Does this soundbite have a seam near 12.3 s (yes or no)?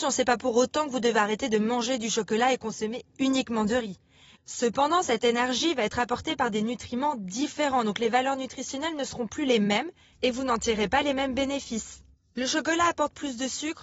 no